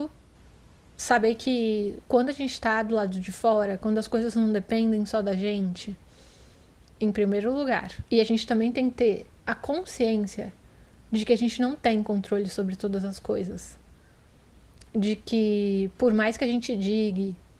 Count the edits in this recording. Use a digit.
3